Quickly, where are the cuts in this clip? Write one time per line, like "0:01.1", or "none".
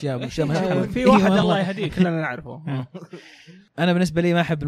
none

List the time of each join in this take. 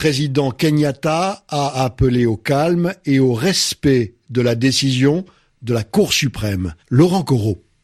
0:06.8

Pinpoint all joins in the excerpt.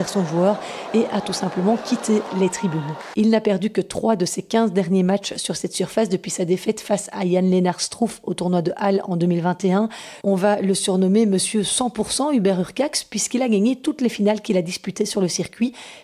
0:03.1
0:10.2

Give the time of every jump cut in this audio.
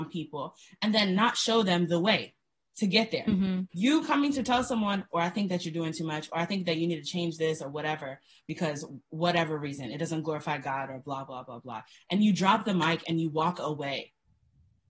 0:03.7
0:05.1

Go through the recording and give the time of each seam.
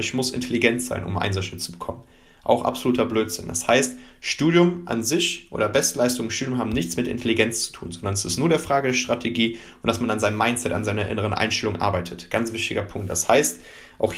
none

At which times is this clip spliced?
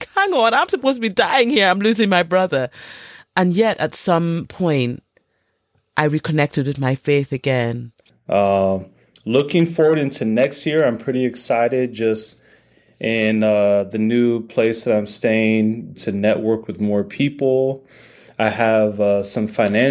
0:15.9

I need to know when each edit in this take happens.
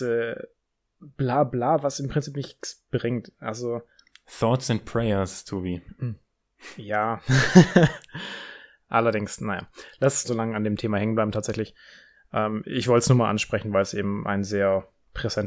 0:10.2

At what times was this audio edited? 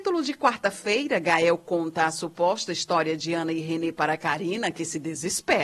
none

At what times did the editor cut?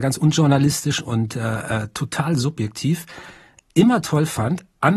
none

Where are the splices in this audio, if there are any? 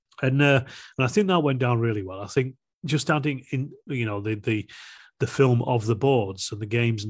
0:03.9

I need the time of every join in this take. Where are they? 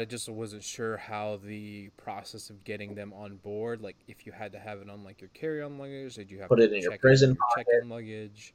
none

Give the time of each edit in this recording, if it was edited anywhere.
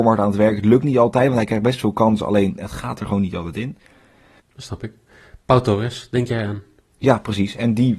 0:04.4

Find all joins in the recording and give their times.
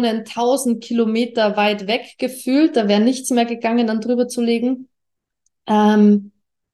none

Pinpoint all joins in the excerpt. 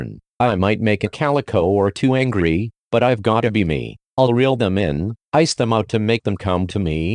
0:05.2

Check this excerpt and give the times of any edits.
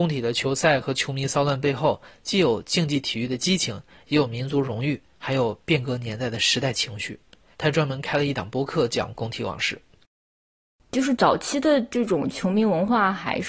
0:07.5

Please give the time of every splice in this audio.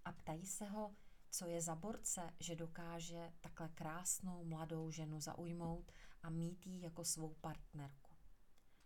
0:01.2

